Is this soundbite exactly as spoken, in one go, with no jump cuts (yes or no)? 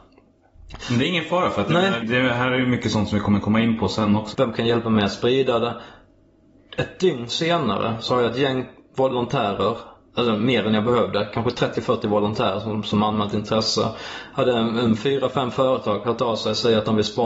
no